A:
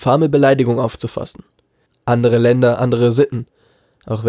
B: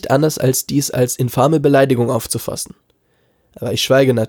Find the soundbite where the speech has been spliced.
A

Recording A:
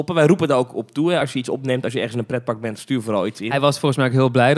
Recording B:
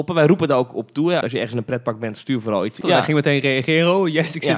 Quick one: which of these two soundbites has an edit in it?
B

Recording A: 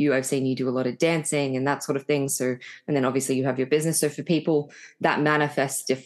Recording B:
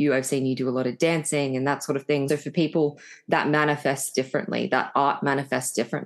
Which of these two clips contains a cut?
B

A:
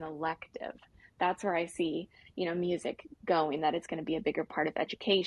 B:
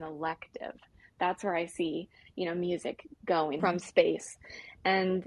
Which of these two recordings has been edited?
B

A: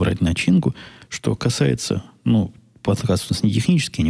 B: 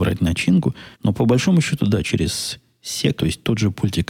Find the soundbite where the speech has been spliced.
B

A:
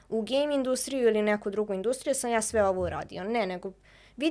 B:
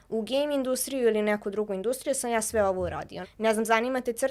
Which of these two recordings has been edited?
B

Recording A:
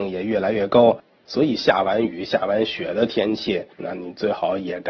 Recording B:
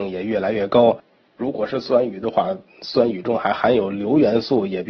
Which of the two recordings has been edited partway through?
A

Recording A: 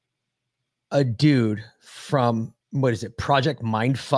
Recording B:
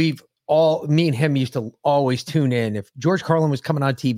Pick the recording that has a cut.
A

